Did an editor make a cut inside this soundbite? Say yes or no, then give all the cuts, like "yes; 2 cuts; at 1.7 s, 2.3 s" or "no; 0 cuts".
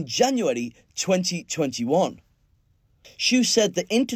yes; 1 cut; at 3.0 s